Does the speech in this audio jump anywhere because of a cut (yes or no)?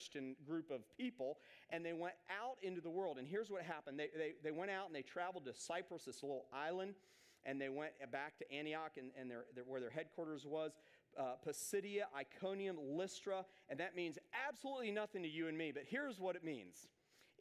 no